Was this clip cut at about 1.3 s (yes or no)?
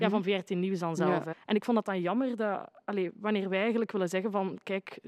yes